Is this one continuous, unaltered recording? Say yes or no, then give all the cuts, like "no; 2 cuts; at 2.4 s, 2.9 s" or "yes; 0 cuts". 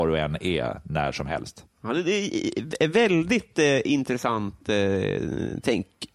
yes; 0 cuts